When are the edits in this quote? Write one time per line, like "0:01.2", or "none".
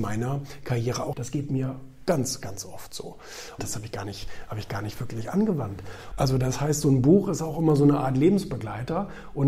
0:01.1
0:03.6
0:06.1